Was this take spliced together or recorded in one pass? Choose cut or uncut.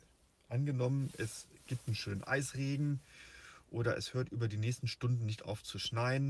uncut